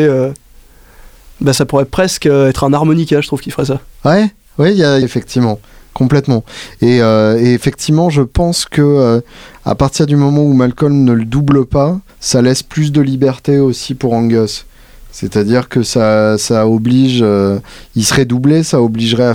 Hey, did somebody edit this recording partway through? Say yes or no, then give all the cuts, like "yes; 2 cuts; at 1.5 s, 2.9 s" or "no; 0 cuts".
yes; 2 cuts; at 5.0 s, 12.1 s